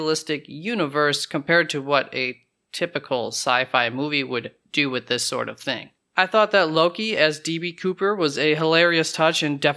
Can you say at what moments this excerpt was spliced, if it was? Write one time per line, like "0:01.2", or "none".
none